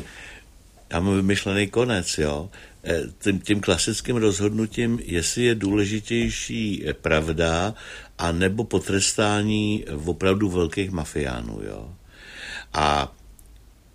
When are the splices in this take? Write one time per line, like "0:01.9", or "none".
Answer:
none